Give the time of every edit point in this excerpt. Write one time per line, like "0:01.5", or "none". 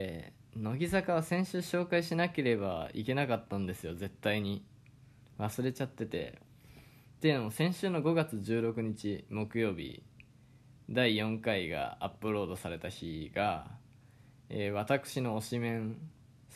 none